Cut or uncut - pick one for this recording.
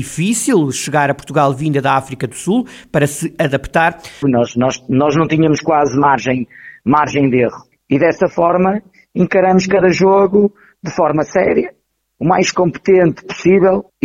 cut